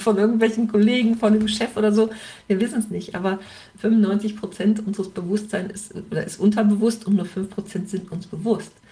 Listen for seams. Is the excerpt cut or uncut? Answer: uncut